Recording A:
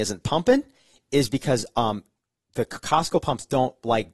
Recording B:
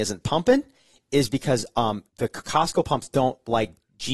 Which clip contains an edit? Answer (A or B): B